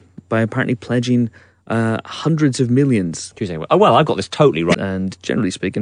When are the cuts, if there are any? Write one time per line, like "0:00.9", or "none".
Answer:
0:03.3
0:04.7